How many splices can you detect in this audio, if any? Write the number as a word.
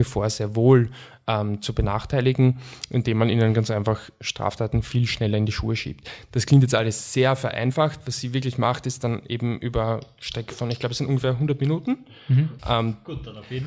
one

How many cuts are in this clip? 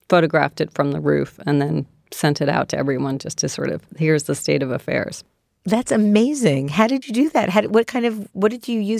zero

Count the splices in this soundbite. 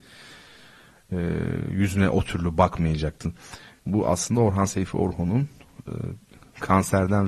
zero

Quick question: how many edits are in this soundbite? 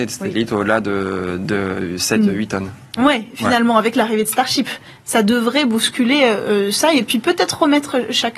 one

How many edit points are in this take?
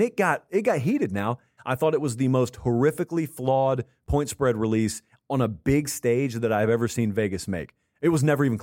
one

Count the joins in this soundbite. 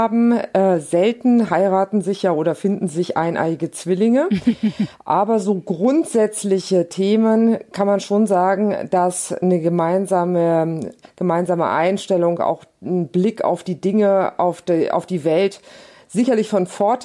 one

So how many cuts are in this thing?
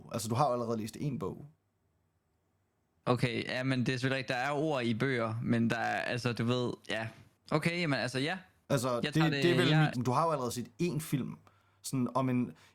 one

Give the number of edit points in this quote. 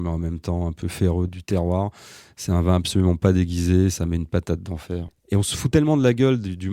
two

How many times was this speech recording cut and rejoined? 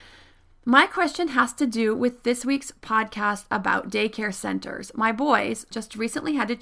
one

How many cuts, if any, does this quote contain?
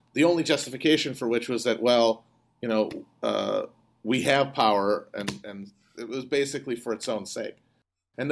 zero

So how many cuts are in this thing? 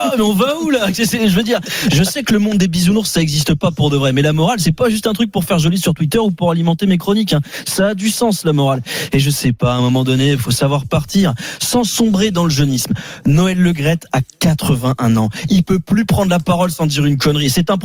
zero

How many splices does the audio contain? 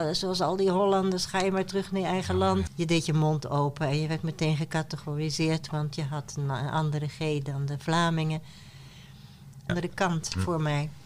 two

